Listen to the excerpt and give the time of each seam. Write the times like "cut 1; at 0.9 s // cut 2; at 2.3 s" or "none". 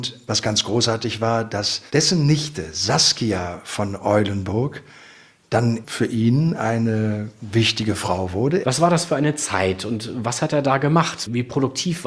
cut 1; at 1.9 s // cut 2; at 8.6 s